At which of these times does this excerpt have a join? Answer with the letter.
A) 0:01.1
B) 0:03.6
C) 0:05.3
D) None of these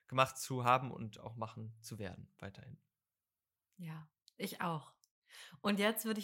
D